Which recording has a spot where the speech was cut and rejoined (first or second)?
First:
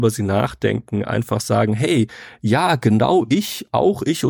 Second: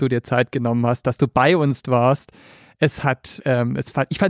second